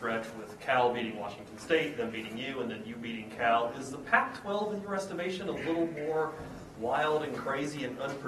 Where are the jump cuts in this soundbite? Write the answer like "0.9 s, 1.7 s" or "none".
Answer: none

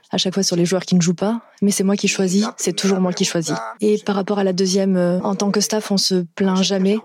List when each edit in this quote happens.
3.8 s, 5.2 s

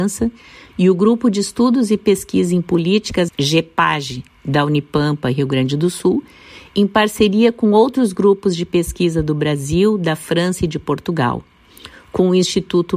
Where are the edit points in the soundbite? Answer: 3.3 s

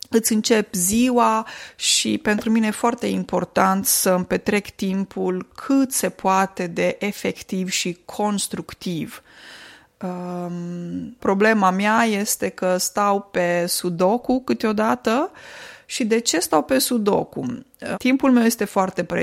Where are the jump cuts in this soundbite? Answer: 11.2 s, 17.9 s

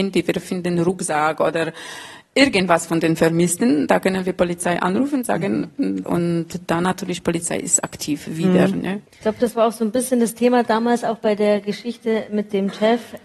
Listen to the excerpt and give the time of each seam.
6.0 s

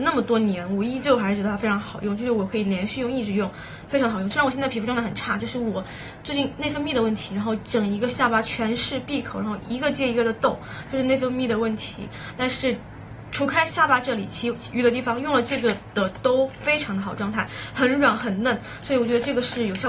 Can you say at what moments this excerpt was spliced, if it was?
4.3 s

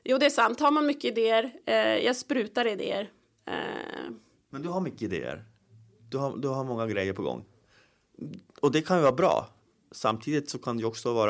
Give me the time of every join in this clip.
4.4 s

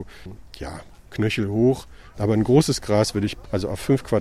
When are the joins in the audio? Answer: 2.1 s

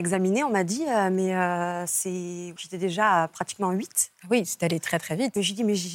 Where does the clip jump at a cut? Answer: 2.6 s

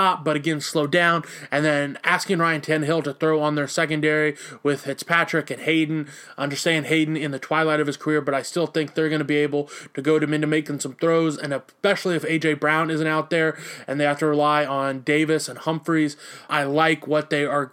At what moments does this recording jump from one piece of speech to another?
16.5 s

